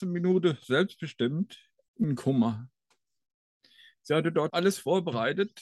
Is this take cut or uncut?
cut